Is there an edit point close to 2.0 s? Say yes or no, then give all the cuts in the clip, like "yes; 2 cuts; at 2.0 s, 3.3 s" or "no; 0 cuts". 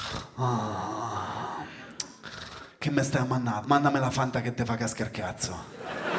no; 1 cut; at 3.6 s